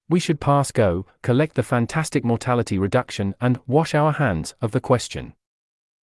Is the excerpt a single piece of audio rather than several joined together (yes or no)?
yes